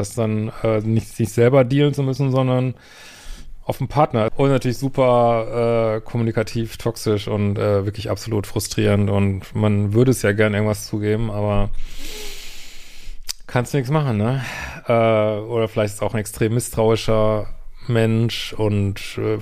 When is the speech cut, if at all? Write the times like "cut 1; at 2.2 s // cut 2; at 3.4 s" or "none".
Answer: cut 1; at 4.3 s